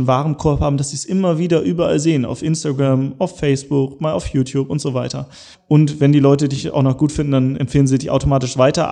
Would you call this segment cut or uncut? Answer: cut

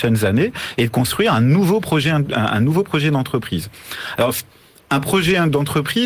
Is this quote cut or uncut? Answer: uncut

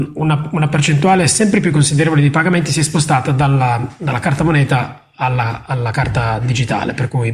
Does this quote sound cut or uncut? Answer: uncut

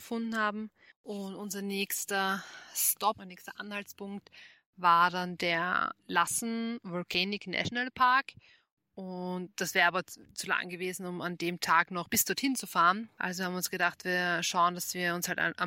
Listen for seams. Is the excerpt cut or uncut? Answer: cut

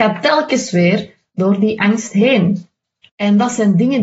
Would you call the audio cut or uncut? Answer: cut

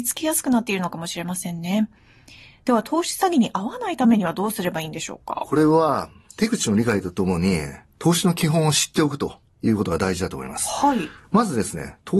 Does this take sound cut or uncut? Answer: uncut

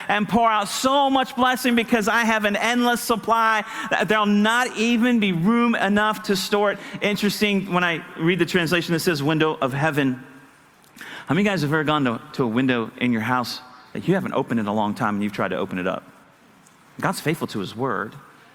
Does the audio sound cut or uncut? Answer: cut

